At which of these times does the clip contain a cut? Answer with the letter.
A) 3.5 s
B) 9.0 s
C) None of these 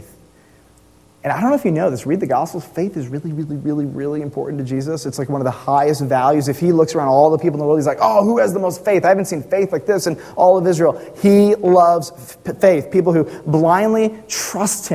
A